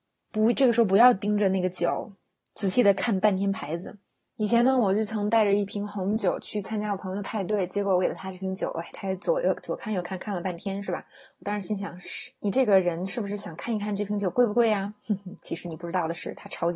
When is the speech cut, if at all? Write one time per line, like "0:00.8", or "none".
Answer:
0:12.4